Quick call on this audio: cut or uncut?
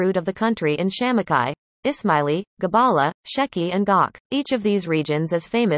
cut